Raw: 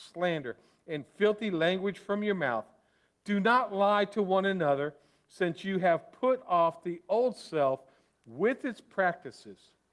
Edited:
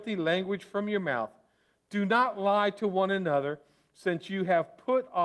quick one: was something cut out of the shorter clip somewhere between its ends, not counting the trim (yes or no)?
no